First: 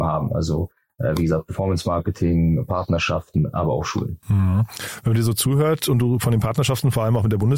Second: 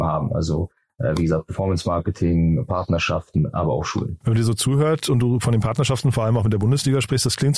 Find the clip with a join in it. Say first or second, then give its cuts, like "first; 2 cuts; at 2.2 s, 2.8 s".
second; 1 cut; at 4.2 s